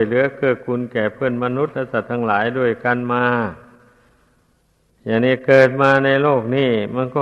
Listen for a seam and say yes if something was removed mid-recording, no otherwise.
no